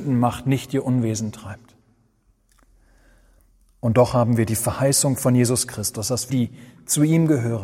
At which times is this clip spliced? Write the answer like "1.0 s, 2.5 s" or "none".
6.3 s